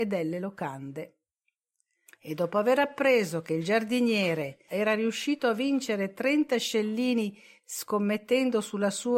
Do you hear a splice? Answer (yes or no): yes